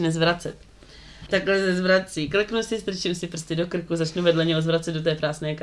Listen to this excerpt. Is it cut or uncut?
cut